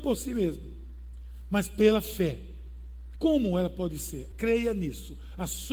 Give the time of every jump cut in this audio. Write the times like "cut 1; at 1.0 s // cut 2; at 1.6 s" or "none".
cut 1; at 3.2 s // cut 2; at 4.3 s